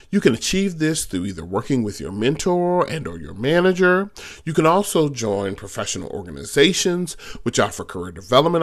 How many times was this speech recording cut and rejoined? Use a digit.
0